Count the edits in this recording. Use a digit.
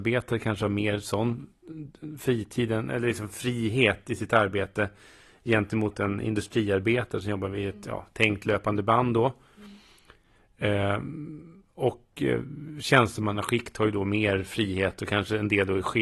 0